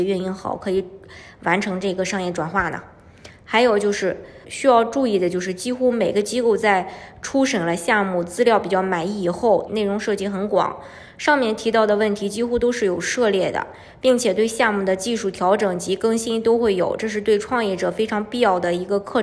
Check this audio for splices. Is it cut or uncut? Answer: cut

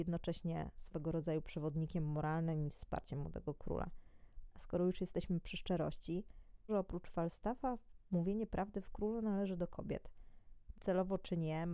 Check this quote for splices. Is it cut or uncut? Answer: cut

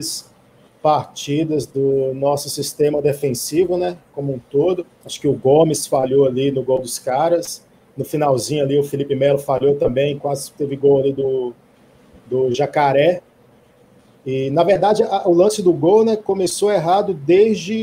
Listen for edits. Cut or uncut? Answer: cut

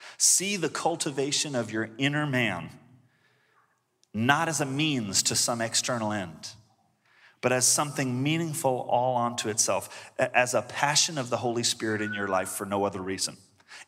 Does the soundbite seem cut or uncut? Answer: uncut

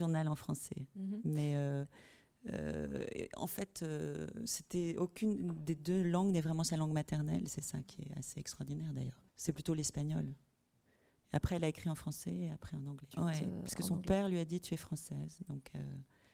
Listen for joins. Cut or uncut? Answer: cut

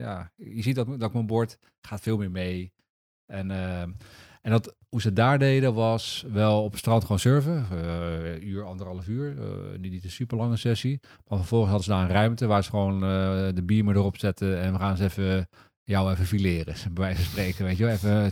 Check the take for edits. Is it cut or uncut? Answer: uncut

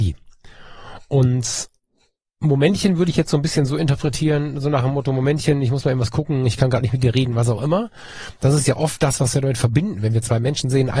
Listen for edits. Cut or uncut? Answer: uncut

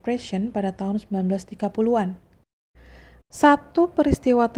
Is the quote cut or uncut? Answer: cut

